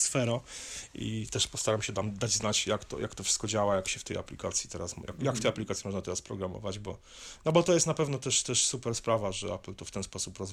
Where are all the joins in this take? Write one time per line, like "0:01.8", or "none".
none